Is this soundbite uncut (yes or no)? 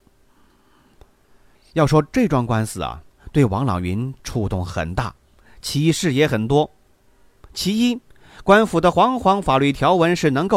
yes